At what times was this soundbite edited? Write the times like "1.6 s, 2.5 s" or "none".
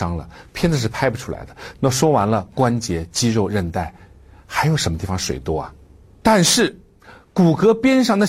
1.7 s, 6.2 s

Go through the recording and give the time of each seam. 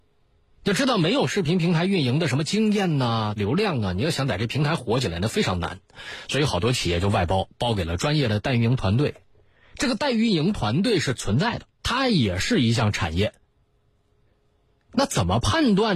3.4 s, 11.8 s

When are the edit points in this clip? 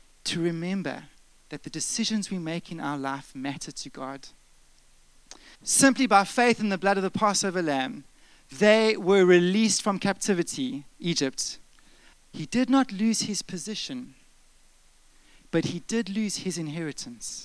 5.5 s, 12.1 s

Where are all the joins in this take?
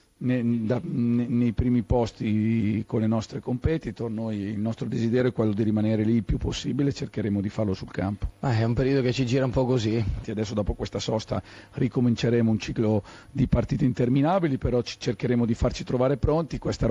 10.2 s

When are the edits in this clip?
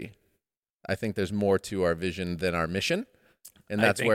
none

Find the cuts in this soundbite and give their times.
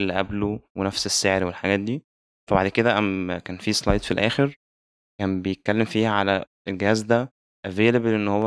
none

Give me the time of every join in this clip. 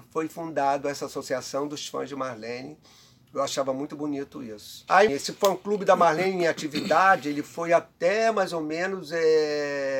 5.1 s

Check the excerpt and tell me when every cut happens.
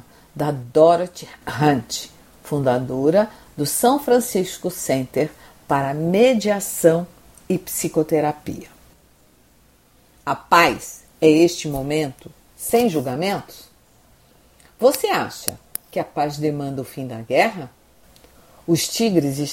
none

